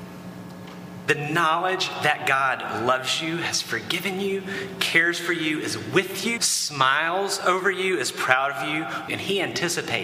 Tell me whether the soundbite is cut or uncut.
cut